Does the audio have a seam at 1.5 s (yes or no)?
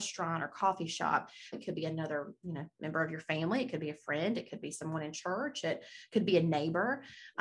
yes